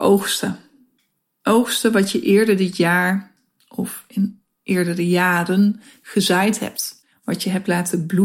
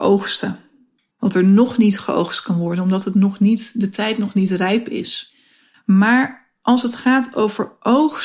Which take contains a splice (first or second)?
second